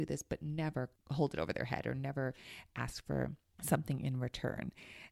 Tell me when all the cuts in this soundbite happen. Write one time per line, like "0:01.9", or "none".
0:01.0